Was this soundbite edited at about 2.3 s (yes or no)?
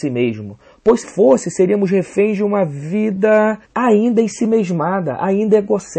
no